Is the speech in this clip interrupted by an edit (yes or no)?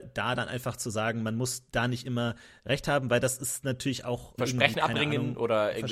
yes